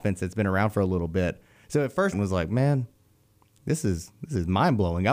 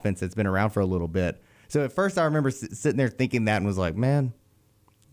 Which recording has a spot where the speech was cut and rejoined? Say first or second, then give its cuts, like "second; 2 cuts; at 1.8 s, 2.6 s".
first; 1 cut; at 2.1 s